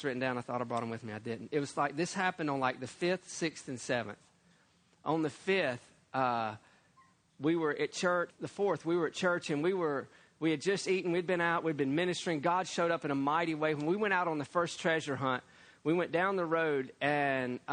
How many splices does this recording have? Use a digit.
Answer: 1